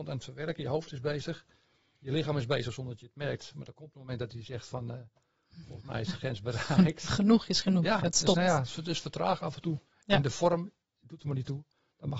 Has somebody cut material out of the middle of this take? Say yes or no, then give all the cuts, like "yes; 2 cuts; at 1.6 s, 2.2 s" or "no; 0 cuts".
no; 0 cuts